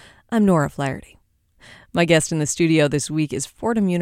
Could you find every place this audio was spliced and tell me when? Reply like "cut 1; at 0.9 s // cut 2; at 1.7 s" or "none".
none